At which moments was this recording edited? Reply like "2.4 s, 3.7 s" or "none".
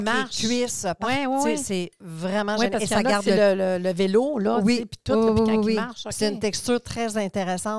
none